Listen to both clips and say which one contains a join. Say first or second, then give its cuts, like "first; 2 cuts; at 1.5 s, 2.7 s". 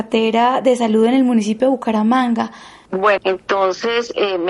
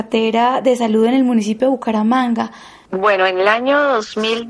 first; 1 cut; at 3.2 s